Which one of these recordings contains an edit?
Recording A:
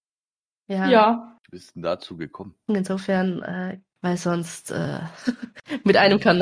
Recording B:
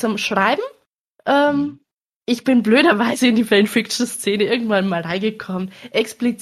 A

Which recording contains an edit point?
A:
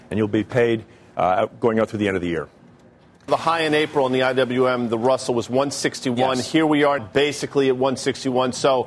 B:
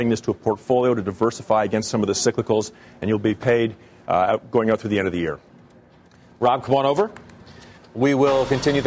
A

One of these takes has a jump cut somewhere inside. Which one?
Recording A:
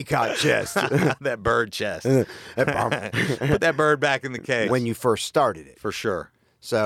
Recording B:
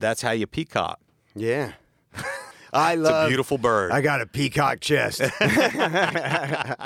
A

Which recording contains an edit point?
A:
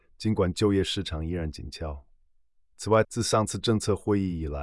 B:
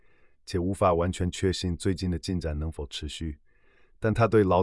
A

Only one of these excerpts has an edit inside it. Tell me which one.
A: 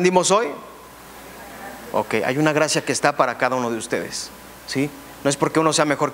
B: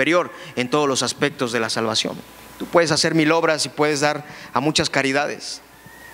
A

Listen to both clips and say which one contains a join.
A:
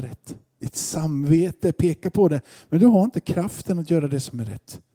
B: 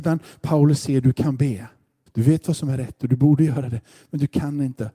B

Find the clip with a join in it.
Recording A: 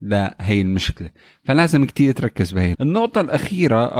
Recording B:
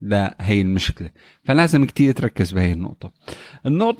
A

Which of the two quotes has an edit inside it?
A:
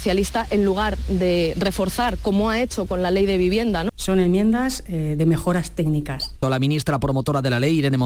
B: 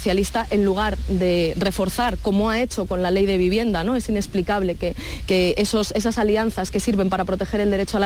A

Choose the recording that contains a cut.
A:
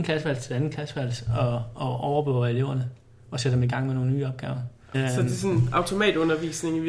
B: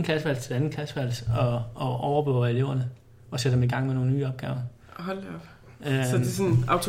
A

